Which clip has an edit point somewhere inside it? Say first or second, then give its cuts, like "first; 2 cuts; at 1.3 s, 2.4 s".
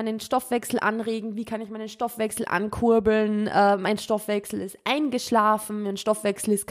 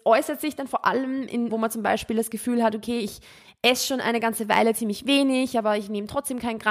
second; 1 cut; at 1.5 s